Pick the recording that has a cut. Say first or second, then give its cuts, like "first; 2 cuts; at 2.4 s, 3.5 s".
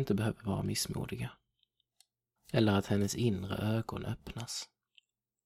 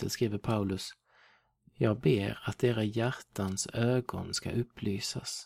first; 1 cut; at 2.4 s